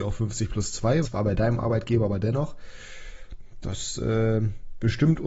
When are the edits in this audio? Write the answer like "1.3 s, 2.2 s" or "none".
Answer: 1.0 s